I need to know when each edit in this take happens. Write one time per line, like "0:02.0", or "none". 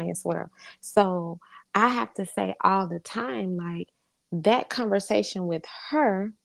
none